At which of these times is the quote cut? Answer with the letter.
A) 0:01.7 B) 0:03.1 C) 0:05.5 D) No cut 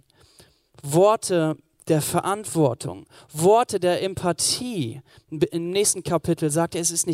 D